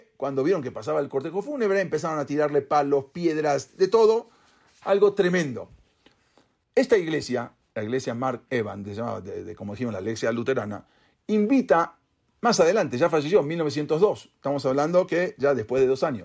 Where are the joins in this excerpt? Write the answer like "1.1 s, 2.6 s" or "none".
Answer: 6.6 s